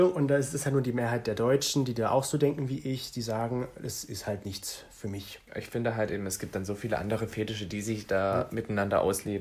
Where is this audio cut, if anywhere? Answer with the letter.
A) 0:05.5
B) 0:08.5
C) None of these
A